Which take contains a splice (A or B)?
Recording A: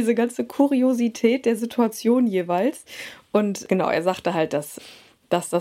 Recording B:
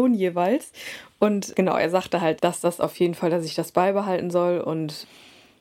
B